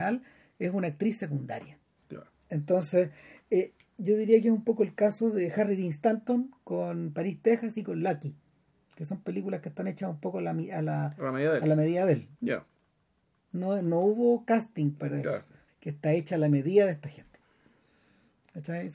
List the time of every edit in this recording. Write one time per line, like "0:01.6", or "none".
0:02.0
0:12.4
0:15.7